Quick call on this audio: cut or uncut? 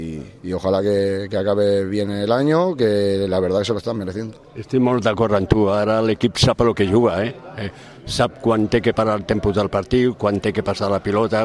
uncut